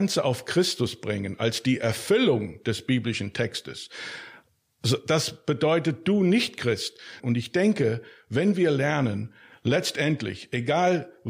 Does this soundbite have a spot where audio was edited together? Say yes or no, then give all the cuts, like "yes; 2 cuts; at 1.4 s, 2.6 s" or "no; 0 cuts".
yes; 1 cut; at 7.2 s